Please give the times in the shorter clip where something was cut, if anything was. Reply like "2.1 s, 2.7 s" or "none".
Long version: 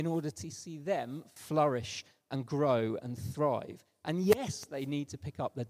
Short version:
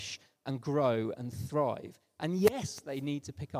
none